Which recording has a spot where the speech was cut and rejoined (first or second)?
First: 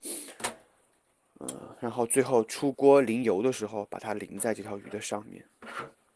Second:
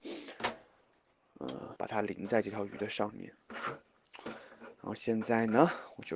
second